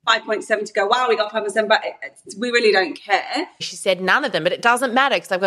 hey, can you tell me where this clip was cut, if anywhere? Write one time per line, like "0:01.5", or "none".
0:03.6